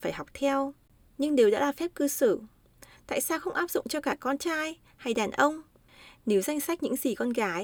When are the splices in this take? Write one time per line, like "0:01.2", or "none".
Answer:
none